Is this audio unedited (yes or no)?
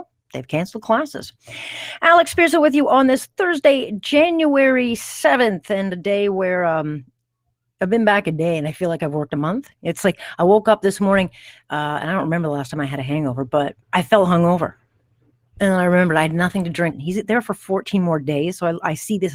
no